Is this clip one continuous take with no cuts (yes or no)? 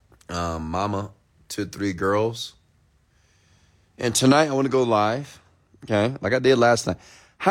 yes